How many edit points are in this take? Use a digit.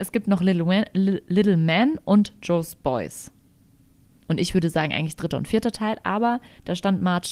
1